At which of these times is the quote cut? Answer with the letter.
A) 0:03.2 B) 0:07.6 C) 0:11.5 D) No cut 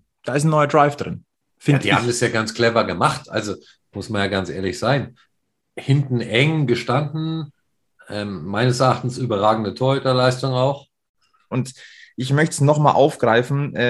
C